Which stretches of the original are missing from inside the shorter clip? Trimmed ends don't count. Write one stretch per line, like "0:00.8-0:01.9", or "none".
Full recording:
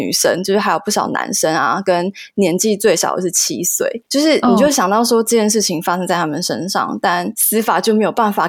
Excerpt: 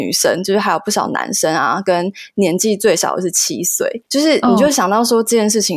none